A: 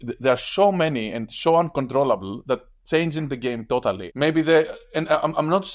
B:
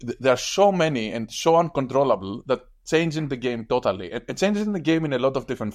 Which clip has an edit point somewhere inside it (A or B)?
A